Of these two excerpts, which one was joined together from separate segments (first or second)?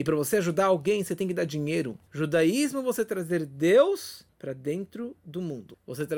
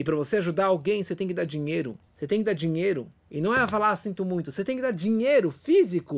first